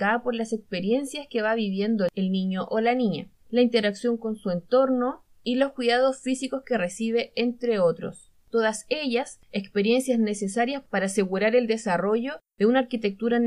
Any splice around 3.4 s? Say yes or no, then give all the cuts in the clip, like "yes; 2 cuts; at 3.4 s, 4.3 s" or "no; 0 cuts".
yes; 1 cut; at 3.4 s